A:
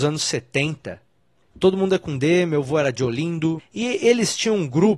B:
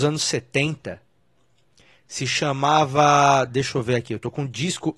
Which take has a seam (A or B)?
A